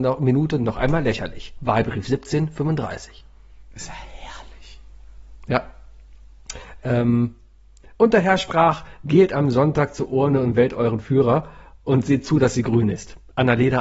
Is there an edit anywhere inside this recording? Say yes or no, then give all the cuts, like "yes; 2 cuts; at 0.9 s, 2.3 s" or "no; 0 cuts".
no; 0 cuts